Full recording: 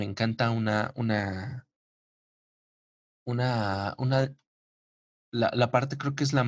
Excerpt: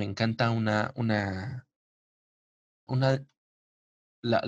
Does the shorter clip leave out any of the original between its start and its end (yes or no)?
yes